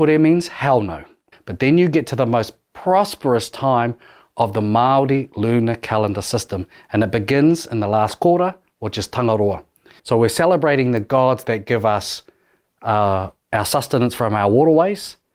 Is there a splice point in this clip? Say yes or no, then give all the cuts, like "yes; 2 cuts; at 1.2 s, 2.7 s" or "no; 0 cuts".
yes; 2 cuts; at 1.3 s, 10.0 s